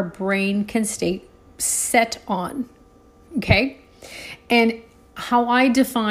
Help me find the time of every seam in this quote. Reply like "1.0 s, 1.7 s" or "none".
none